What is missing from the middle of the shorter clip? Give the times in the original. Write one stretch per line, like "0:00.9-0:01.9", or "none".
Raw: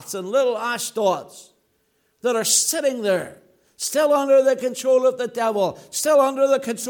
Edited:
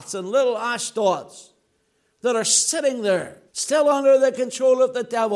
0:03.5-0:03.7